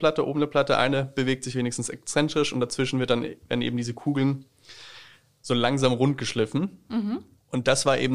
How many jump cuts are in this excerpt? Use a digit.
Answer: 0